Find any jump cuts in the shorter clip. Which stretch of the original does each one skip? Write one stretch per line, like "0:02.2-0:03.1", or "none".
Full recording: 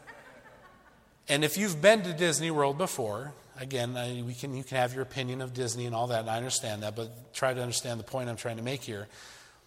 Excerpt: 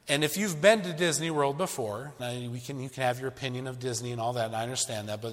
0:03.4-0:03.9